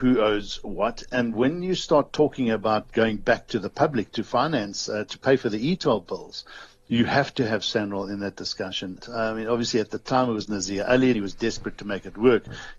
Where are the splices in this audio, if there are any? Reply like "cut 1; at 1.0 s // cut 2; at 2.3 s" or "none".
cut 1; at 9.0 s // cut 2; at 11.1 s